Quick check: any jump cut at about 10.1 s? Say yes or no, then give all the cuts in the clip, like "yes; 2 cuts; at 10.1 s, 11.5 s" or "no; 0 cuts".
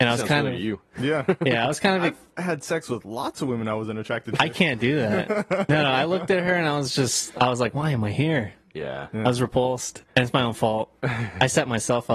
yes; 1 cut; at 10.1 s